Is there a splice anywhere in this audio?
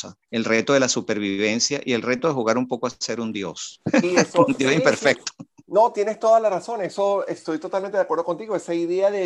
no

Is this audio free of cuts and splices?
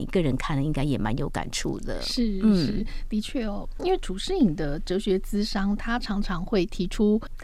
yes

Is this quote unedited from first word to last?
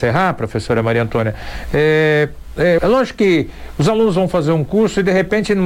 no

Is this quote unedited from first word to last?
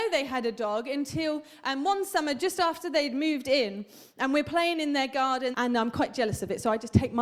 no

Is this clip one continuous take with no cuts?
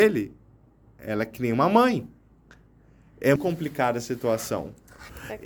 no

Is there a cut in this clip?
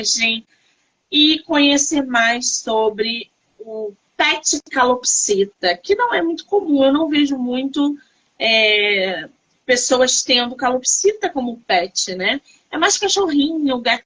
no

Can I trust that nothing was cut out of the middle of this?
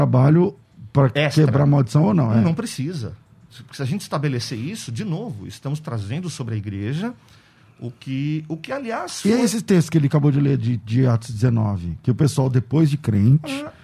yes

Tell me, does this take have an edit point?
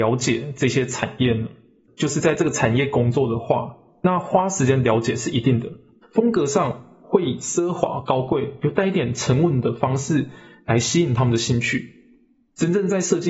yes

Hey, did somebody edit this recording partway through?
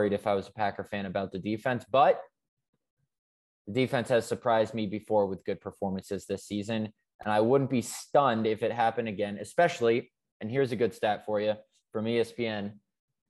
no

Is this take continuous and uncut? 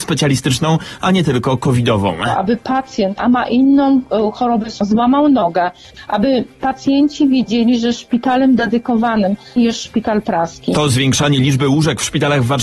no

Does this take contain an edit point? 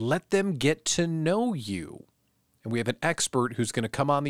no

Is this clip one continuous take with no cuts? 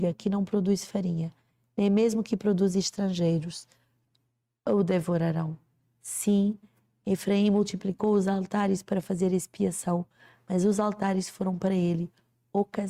yes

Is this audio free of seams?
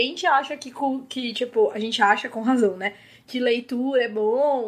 yes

